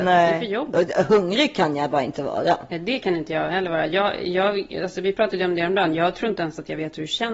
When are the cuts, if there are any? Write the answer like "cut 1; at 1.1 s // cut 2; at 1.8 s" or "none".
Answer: none